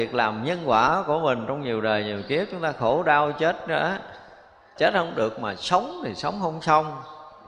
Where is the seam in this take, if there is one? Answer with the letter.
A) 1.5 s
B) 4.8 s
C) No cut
B